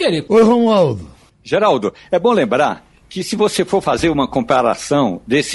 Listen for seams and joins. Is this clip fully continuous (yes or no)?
yes